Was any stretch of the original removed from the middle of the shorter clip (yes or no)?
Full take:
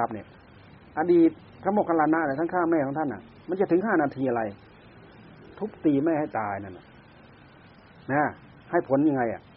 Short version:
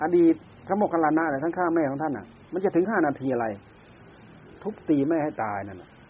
no